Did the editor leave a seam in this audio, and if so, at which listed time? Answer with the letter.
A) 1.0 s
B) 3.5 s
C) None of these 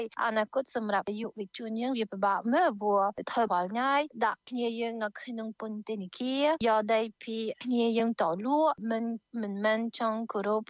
B